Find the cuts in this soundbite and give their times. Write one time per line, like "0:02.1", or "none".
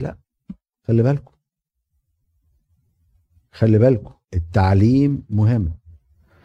0:04.2